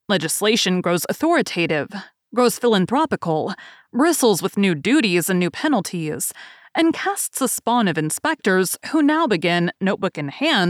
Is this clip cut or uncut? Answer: uncut